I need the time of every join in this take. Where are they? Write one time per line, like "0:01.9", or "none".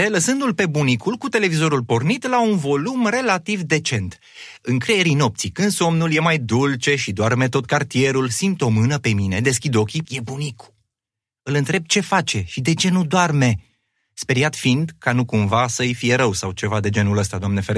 0:10.0

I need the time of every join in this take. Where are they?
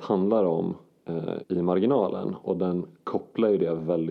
0:01.4

